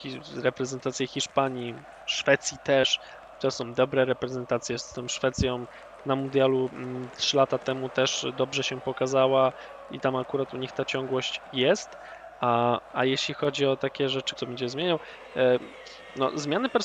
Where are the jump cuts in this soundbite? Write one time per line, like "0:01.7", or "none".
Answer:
0:06.0
0:14.4